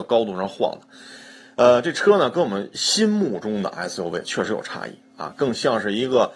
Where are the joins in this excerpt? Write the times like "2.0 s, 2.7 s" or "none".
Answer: none